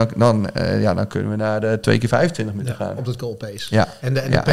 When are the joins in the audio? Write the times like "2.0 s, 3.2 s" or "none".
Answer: 3.0 s

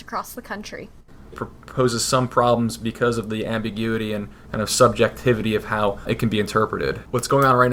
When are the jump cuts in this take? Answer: 1.3 s

